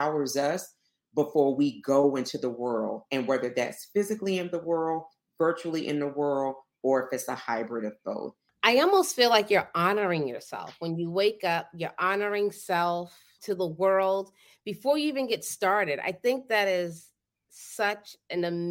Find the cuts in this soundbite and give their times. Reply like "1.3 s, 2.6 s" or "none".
8.5 s, 13.4 s